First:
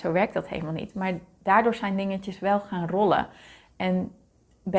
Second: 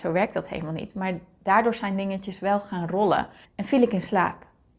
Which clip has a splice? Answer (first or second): second